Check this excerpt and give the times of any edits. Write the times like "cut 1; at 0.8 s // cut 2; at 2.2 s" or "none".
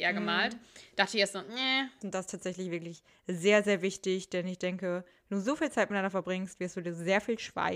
cut 1; at 2.0 s